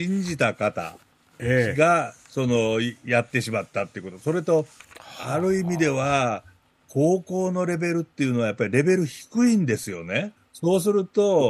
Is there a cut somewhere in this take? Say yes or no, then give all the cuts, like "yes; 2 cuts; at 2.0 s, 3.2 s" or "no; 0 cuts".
yes; 1 cut; at 10.4 s